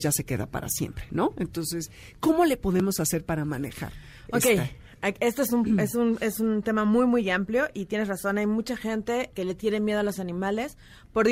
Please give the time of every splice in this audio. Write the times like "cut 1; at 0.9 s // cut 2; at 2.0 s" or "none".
cut 1; at 9.3 s